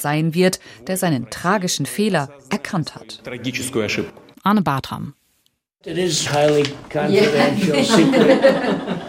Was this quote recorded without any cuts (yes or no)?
no